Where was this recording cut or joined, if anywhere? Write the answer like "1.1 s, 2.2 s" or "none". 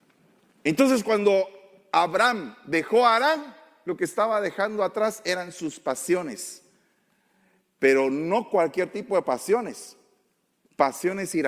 none